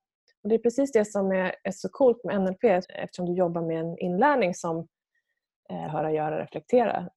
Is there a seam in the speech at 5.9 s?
yes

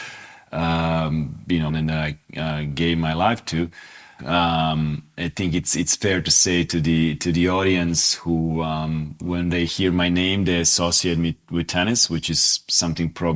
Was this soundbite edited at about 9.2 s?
yes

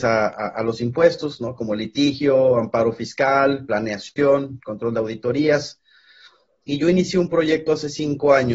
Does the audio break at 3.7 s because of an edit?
no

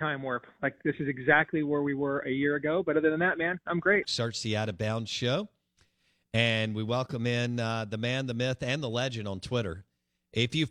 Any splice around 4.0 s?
yes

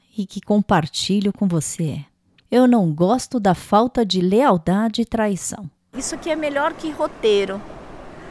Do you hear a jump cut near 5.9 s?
yes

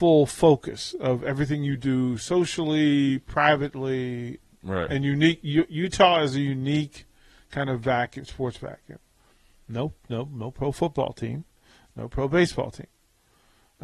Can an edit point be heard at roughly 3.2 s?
no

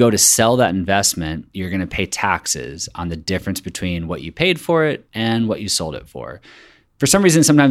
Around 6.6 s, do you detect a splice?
no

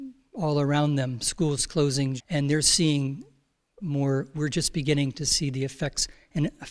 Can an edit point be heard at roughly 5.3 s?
no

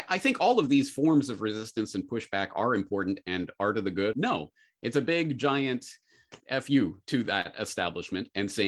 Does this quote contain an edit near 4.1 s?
yes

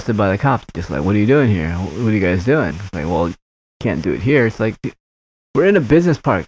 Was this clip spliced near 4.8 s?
no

